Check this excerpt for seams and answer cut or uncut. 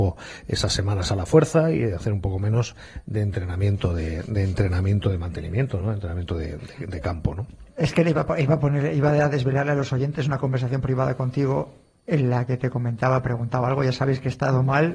uncut